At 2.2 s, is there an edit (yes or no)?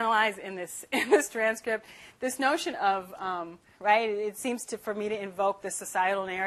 no